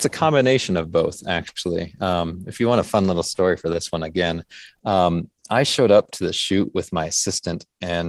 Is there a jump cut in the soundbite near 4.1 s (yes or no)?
no